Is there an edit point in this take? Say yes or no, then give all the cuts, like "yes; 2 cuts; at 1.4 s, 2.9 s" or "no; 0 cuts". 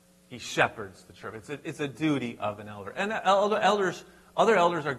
no; 0 cuts